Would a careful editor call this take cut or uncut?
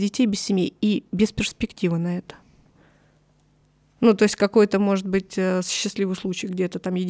uncut